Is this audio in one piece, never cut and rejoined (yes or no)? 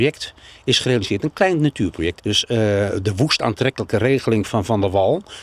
no